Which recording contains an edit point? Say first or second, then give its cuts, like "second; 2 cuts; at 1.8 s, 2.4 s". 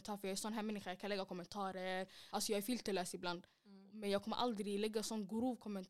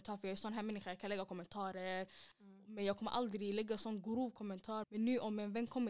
second; 2 cuts; at 2.3 s, 4.8 s